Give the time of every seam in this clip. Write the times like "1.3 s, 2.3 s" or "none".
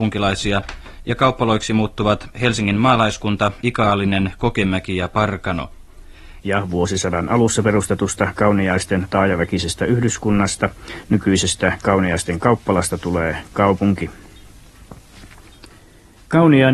3.6 s, 6.4 s